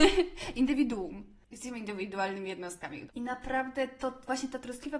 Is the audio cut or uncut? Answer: cut